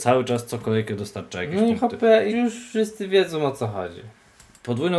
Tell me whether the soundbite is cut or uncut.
cut